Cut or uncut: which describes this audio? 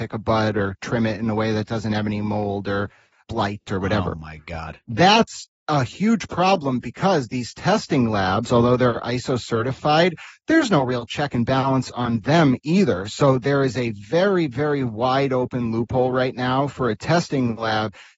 uncut